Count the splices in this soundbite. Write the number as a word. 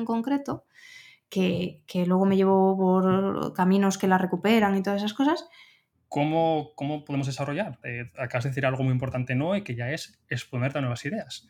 two